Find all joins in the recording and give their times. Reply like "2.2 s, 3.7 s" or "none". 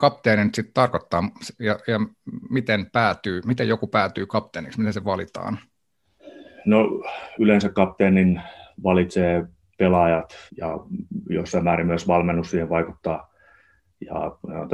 7.4 s, 10.5 s